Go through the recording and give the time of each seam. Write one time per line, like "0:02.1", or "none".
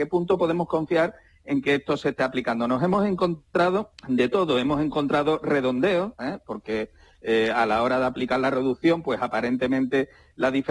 0:04.0